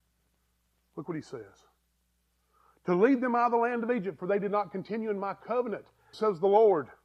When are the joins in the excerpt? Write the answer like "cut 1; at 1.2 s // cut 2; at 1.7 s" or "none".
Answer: cut 1; at 6.1 s

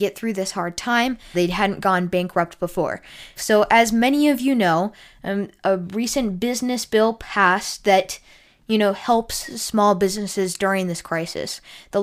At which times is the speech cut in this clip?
cut 1; at 1.3 s // cut 2; at 3.4 s

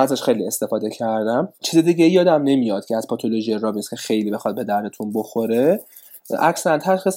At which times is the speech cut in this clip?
cut 1; at 1.5 s

